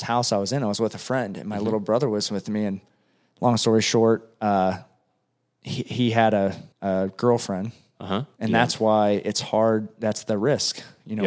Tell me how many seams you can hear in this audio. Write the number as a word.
two